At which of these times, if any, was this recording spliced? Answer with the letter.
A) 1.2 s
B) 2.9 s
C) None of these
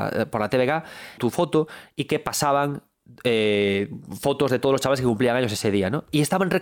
A